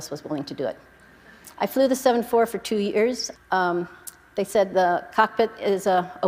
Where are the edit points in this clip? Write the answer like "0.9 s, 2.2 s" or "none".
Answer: 1.5 s, 3.4 s